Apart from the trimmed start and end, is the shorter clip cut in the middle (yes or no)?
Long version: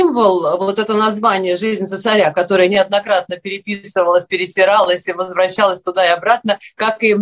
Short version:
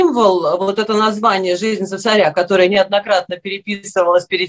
no